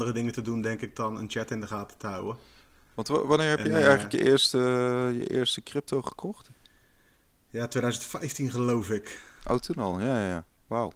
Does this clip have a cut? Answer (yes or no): no